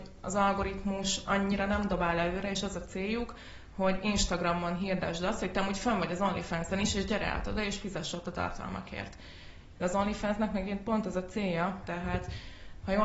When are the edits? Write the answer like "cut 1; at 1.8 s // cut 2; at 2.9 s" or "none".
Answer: cut 1; at 9.8 s // cut 2; at 11.8 s